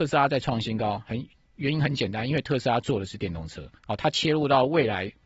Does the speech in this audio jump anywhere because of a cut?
yes; 1 cut; at 3.8 s

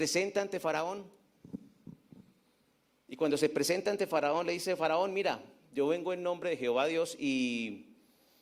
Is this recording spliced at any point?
no; 0 cuts

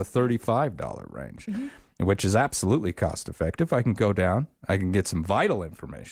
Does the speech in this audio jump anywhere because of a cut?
no; 0 cuts

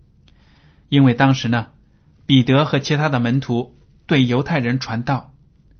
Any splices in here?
no; 0 cuts

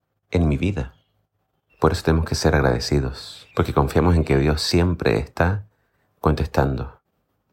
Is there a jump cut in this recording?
yes; 2 cuts; at 1.7 s, 3.5 s

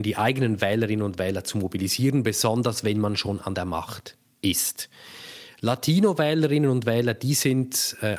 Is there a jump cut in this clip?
no; 0 cuts

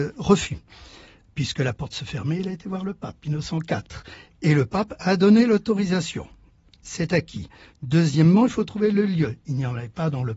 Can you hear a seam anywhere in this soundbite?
no; 0 cuts

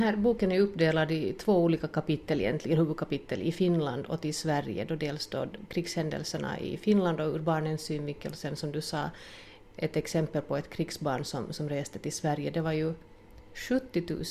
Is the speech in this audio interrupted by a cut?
no; 0 cuts

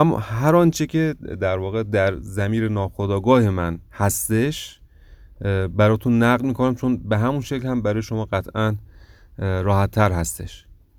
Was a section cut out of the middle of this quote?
yes; 1 cut; at 3.9 s

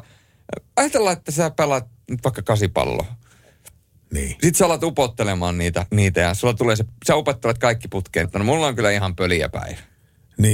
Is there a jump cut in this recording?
yes; 2 cuts; at 5.9 s, 8.2 s

